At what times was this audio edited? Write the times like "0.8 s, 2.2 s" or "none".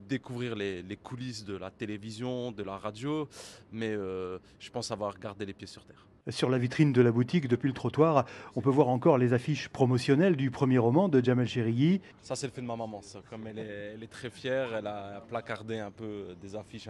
none